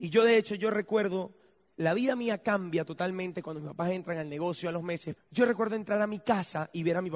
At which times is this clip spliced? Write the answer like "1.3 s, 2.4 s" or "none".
5.2 s